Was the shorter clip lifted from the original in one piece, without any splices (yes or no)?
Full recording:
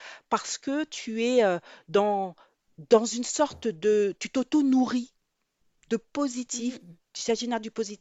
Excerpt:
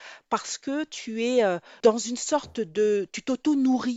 no